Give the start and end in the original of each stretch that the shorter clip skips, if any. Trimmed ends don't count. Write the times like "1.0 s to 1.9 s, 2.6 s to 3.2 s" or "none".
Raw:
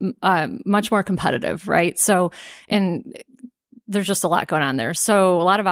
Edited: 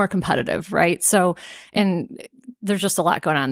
3.5 s to 3.8 s